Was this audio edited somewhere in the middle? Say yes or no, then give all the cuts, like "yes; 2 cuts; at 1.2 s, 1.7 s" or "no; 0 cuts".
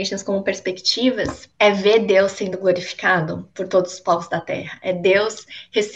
no; 0 cuts